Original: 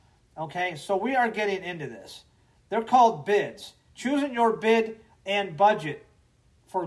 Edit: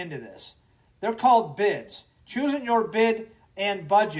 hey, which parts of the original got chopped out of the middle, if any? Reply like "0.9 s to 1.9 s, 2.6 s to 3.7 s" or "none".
none